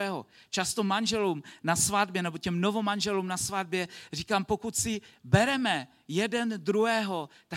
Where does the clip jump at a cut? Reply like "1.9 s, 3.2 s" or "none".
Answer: none